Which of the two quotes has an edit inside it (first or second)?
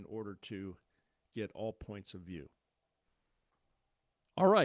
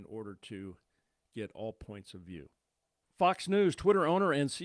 second